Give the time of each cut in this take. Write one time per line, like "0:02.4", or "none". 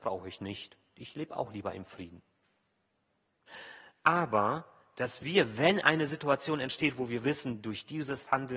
0:00.9